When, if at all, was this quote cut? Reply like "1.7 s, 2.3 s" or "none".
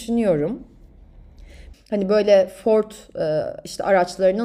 1.7 s